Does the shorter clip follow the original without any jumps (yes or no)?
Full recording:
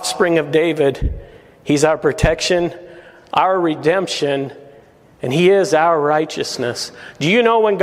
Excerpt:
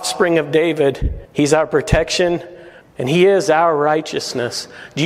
no